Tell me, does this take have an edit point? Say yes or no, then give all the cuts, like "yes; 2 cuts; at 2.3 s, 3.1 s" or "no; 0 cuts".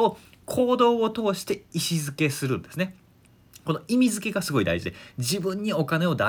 no; 0 cuts